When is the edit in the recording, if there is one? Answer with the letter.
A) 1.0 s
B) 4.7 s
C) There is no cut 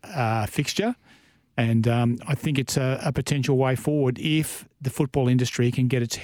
B